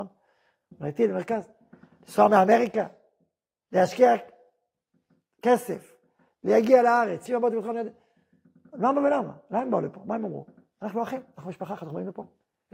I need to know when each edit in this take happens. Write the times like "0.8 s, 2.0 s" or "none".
7.3 s